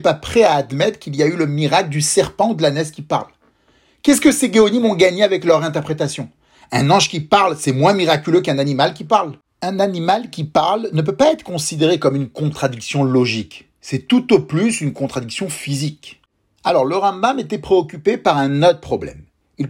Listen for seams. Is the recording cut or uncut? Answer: uncut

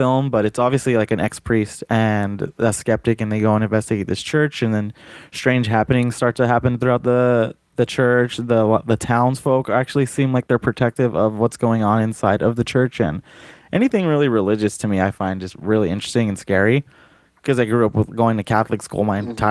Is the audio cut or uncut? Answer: uncut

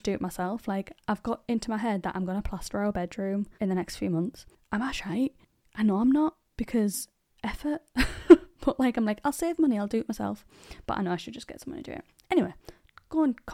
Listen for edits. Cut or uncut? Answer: cut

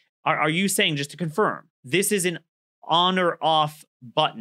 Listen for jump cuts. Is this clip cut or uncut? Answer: cut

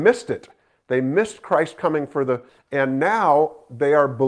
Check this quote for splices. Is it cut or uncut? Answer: cut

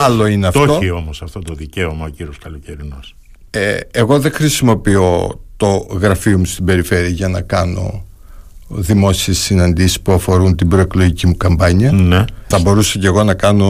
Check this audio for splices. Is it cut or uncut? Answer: cut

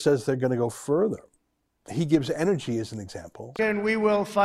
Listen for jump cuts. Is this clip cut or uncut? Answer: cut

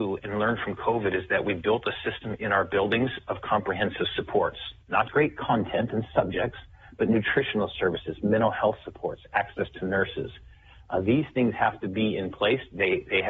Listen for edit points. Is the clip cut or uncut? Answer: cut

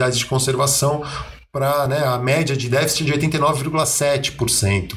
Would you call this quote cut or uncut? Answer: uncut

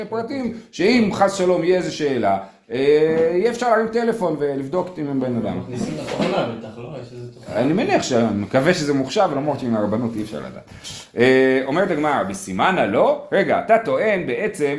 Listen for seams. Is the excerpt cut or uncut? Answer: uncut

